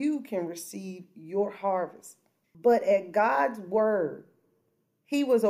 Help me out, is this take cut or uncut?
cut